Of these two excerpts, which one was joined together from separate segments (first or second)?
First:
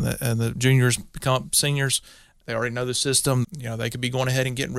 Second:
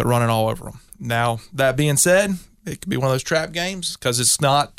first